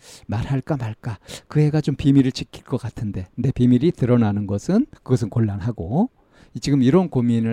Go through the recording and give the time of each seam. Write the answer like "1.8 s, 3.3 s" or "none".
3.5 s, 5.0 s